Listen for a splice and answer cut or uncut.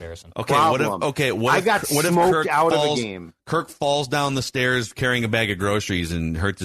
uncut